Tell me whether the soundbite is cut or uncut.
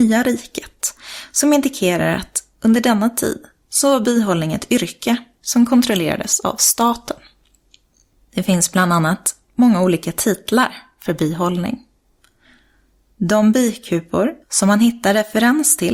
cut